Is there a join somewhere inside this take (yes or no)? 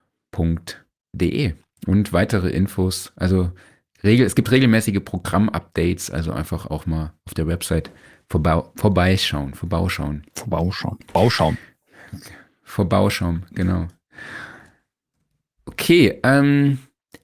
no